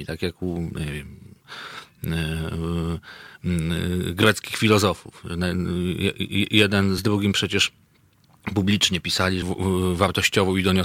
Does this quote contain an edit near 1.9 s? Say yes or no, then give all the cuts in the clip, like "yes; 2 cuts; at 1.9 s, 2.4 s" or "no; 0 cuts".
no; 2 cuts; at 7.0 s, 9.4 s